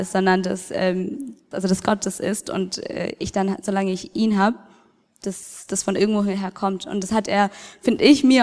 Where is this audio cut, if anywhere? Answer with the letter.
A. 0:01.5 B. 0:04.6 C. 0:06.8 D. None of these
A